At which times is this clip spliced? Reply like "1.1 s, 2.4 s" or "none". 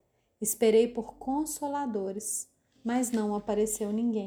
none

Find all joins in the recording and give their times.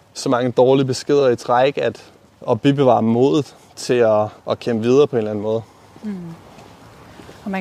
2.4 s, 4.4 s

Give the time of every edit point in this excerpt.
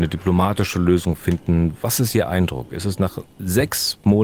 none

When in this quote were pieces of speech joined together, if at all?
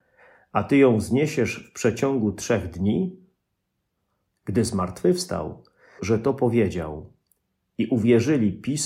4.3 s, 6.0 s

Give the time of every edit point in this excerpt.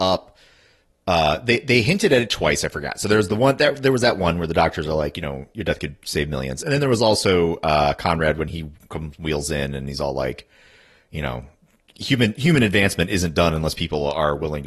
none

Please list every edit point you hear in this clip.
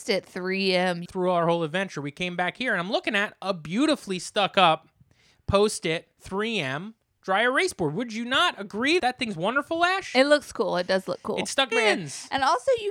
1.0 s, 9.0 s, 11.7 s

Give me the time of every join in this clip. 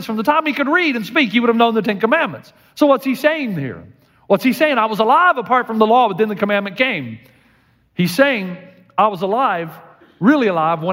none

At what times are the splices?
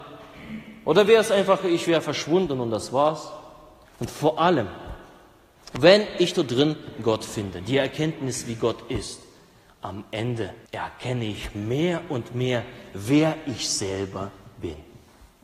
3.9 s, 10.7 s

